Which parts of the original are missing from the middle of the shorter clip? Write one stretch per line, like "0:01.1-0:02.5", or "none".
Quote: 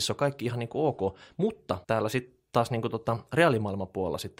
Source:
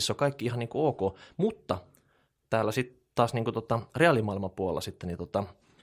0:01.8-0:02.5